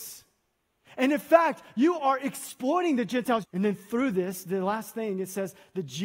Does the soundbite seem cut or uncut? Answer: cut